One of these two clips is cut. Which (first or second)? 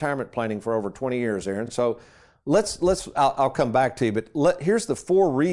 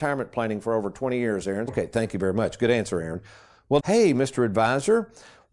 second